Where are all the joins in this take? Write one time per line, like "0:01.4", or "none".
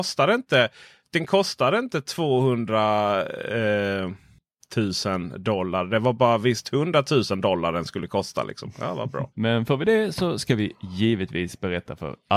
0:01.0
0:09.3